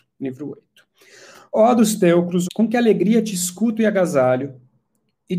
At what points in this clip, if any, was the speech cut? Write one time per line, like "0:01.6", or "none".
0:02.4